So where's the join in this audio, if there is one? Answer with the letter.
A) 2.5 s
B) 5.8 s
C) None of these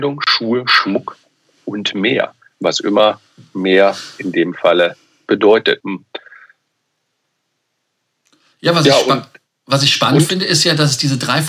B